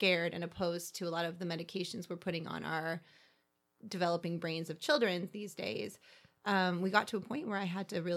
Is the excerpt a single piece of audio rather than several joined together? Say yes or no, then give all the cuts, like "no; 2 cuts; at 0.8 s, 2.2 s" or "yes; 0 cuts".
yes; 0 cuts